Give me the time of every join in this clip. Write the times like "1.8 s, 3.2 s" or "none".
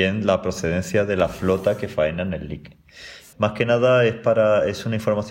3.3 s